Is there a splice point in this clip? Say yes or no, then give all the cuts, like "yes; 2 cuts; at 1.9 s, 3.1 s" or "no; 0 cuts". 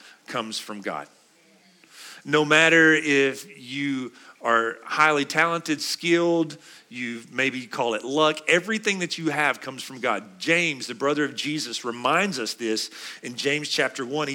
no; 0 cuts